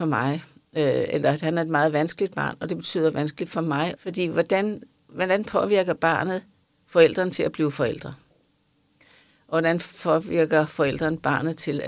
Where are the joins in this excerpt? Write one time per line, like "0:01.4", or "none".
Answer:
0:04.0